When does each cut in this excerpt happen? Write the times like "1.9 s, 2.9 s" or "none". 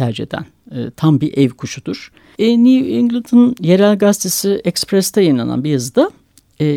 2.3 s

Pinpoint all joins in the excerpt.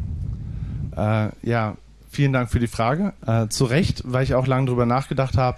3.2 s

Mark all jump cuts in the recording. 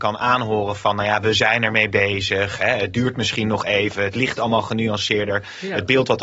none

